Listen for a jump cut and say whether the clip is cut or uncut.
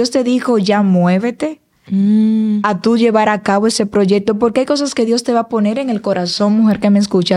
uncut